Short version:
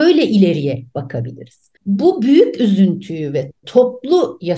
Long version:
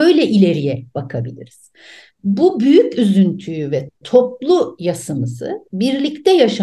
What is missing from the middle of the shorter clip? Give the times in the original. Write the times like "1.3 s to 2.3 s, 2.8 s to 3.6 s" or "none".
1.8 s to 2.1 s